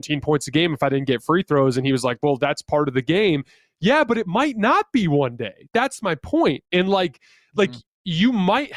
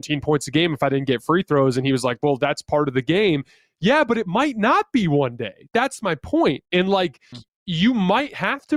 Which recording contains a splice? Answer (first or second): second